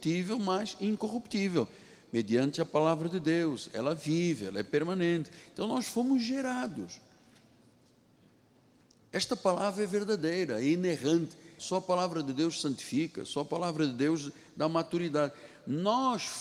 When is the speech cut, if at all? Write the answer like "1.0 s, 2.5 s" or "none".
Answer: 11.6 s